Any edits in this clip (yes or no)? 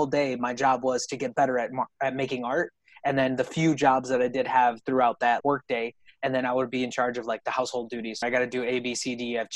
yes